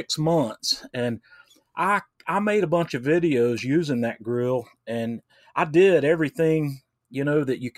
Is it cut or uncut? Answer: uncut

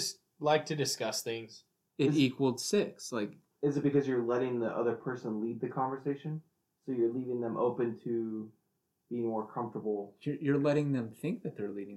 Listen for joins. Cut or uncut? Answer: cut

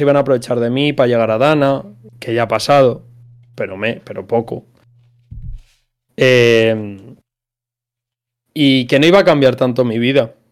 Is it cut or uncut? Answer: uncut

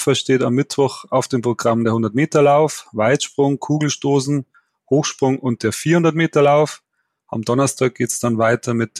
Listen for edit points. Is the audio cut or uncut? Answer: uncut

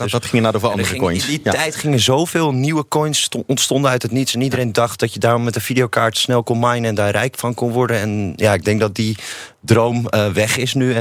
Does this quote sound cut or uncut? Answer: uncut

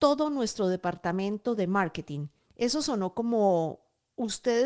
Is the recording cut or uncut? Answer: cut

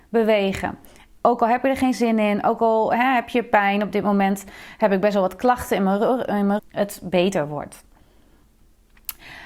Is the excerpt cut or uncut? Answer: cut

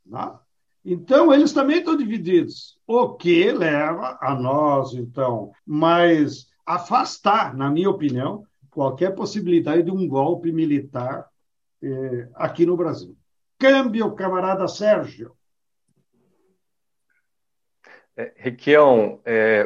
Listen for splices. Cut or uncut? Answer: cut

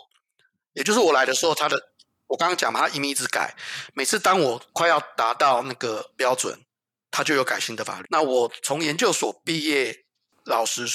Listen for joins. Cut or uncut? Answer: cut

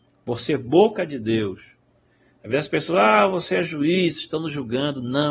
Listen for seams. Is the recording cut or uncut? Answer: uncut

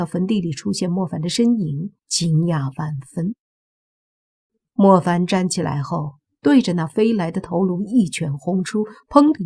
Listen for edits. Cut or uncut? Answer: cut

